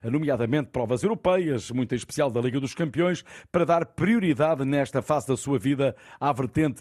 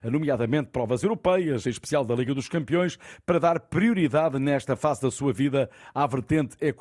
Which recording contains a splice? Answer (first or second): second